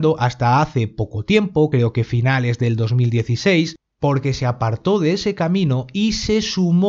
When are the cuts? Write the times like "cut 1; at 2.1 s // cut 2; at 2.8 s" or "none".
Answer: none

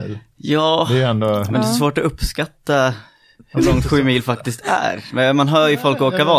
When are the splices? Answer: none

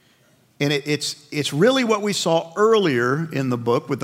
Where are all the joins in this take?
none

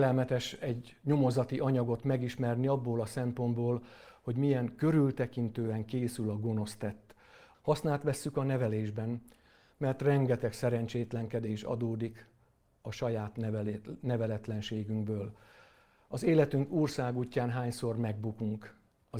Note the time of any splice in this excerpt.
cut 1; at 7.5 s

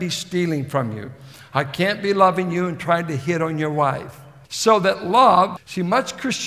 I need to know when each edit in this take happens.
cut 1; at 4.4 s // cut 2; at 5.6 s

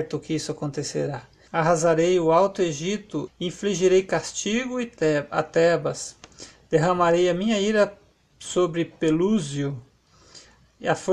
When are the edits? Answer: cut 1; at 1.5 s // cut 2; at 3.3 s

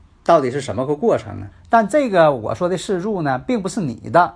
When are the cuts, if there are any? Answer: cut 1; at 1.5 s

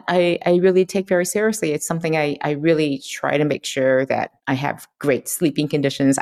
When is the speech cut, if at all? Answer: cut 1; at 4.4 s

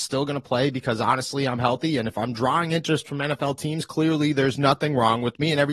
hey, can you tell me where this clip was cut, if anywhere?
none

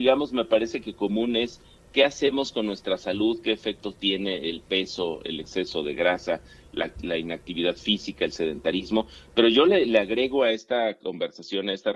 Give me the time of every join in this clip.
none

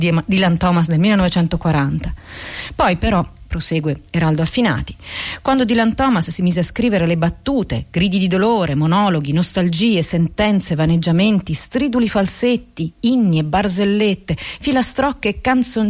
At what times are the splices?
none

